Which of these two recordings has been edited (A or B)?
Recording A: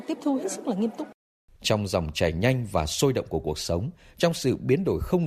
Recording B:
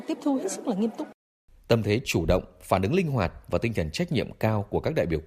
A